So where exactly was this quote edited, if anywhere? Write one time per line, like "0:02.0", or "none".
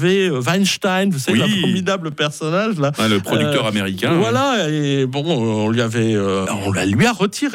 0:06.5